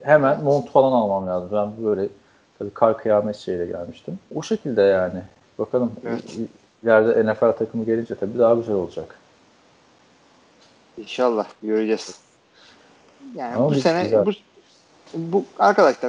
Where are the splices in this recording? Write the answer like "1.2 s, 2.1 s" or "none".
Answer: 4.3 s

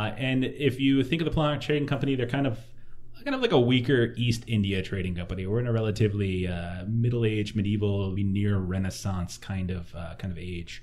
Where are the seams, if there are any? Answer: 8.2 s

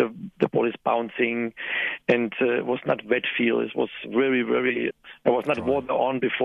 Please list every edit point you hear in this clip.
4.9 s

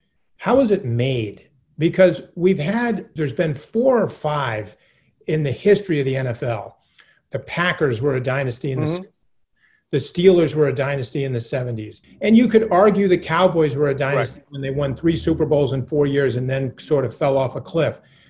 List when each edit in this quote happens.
3.2 s, 12.0 s

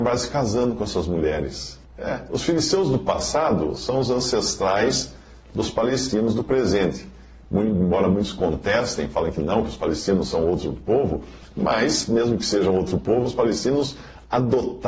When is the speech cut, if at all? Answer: 1.8 s

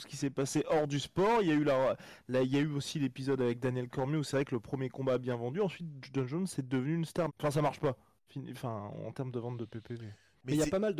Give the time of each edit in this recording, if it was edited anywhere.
7.3 s

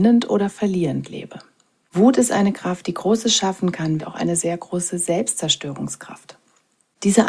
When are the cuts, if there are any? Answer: 4.0 s

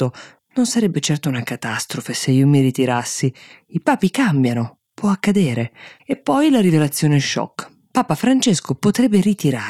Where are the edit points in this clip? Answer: 6.0 s

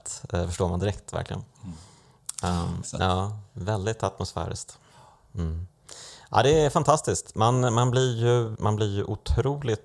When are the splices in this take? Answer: 2.8 s, 8.6 s

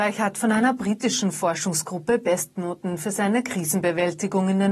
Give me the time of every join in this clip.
none

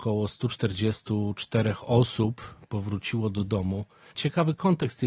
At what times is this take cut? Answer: 4.1 s

